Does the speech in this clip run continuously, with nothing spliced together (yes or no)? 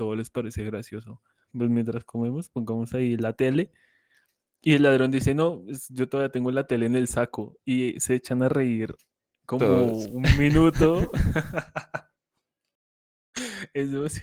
no